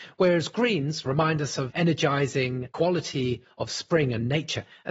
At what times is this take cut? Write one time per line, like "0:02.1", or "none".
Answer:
0:01.7